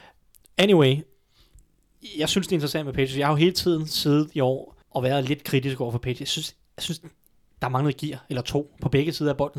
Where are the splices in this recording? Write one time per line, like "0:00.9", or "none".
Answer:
0:04.8